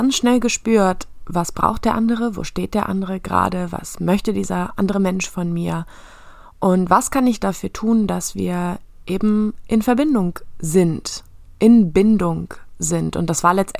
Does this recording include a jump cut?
no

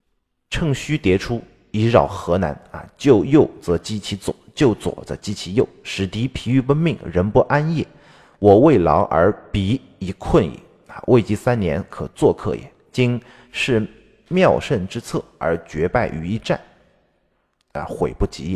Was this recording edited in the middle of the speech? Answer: no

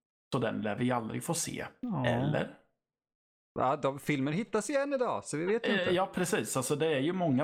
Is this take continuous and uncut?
yes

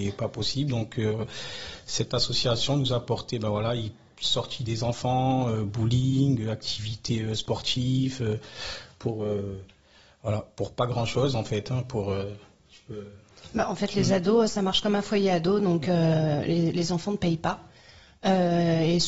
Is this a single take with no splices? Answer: yes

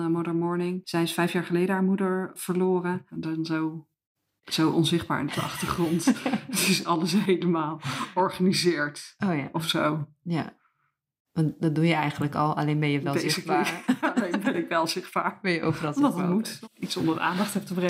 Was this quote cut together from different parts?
yes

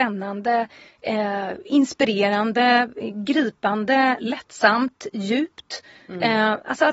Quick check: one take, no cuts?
yes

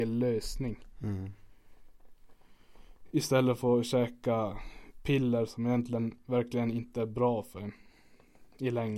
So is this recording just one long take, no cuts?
yes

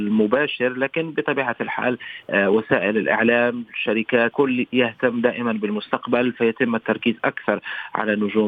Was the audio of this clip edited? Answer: yes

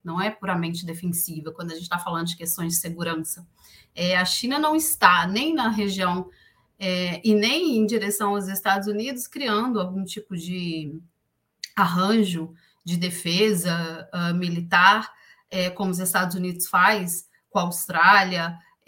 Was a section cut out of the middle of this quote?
no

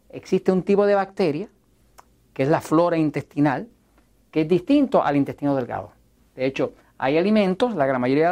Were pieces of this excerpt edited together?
no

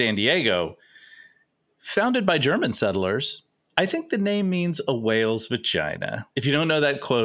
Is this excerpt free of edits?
no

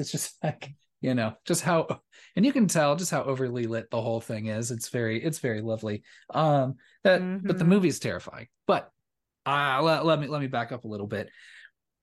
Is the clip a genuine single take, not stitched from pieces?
yes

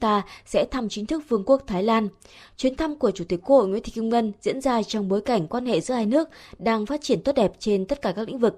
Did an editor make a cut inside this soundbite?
no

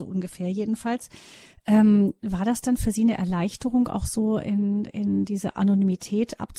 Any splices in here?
no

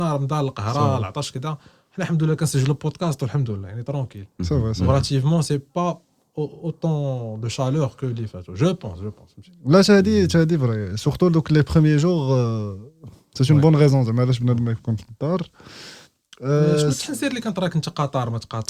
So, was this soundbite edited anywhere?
no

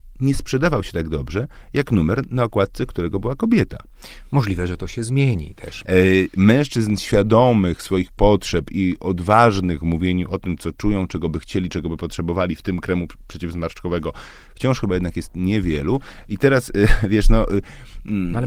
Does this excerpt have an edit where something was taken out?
yes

